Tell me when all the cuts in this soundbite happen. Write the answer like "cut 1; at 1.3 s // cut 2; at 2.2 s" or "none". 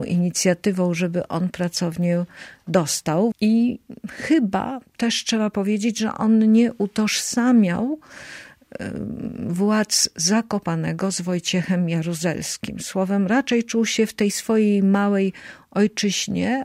cut 1; at 3.3 s

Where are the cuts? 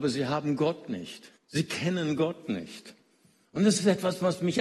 cut 1; at 1.4 s

